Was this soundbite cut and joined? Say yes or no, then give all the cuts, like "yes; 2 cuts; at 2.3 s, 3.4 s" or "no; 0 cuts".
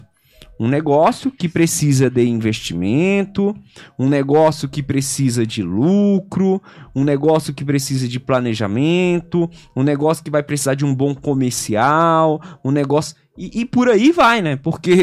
no; 0 cuts